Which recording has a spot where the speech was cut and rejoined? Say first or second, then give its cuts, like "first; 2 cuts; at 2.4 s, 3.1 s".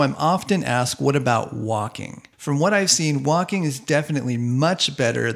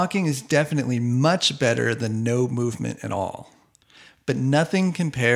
first; 1 cut; at 2.3 s